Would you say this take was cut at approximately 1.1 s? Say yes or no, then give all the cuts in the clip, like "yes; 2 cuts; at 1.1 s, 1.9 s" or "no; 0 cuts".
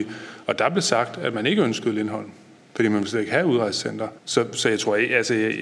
no; 1 cut; at 4.2 s